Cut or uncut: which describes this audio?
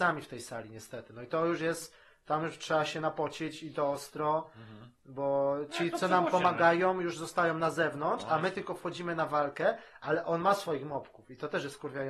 uncut